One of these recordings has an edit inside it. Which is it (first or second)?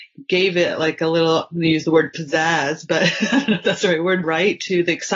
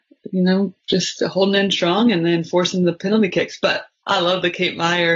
first